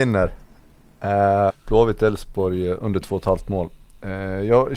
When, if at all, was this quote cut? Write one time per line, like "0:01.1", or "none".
0:01.5